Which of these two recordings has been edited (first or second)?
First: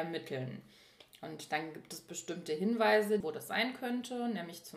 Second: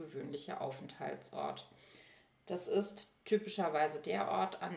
first